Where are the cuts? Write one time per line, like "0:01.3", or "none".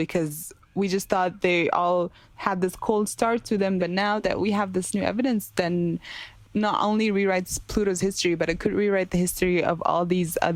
0:03.8